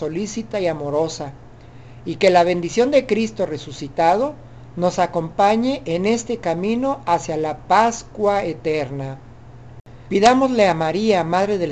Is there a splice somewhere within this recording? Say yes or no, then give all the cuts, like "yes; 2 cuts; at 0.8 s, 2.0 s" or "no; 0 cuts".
yes; 1 cut; at 10.1 s